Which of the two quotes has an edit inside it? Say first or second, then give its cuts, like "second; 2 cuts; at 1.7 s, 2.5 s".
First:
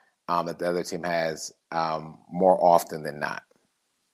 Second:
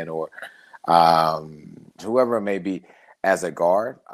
second; 1 cut; at 2.0 s